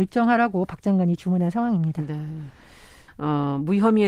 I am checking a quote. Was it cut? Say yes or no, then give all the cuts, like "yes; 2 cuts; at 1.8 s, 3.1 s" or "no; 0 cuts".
yes; 1 cut; at 3.1 s